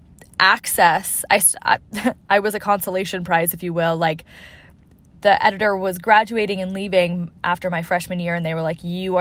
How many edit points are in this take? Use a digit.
0